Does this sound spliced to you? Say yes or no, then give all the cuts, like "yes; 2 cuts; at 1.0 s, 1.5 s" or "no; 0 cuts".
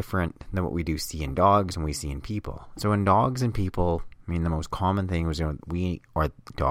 yes; 1 cut; at 5.6 s